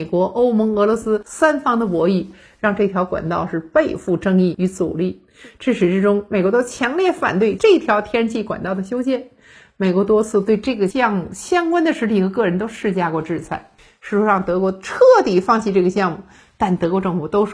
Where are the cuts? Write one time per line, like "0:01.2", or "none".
none